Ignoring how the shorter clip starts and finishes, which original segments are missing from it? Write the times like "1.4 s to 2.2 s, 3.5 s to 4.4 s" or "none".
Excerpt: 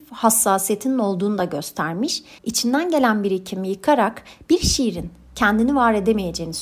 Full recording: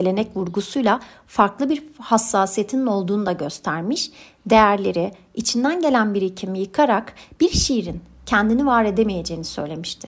4.3 s to 5.3 s